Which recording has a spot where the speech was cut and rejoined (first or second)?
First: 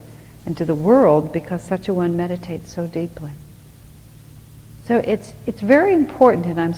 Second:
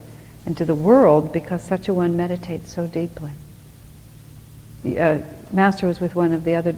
second